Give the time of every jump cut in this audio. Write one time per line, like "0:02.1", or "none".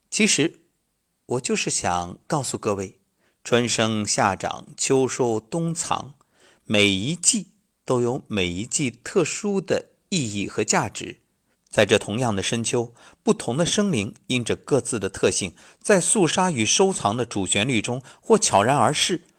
0:11.5